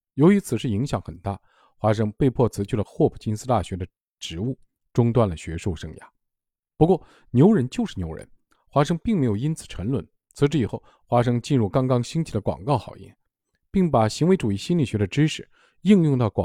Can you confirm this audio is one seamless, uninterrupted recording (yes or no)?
yes